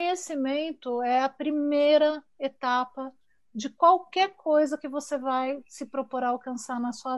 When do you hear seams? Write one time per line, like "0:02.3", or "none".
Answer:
none